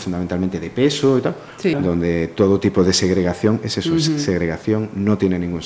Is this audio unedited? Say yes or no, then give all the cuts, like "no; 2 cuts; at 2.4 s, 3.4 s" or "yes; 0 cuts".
no; 1 cut; at 1.7 s